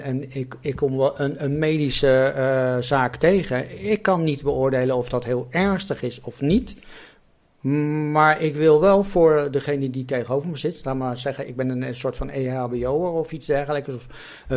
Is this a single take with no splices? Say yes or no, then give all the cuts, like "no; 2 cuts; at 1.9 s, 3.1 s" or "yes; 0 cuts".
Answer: yes; 0 cuts